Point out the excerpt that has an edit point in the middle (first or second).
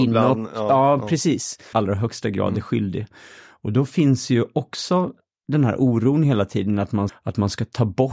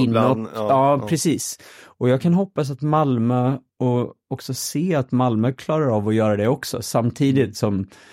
first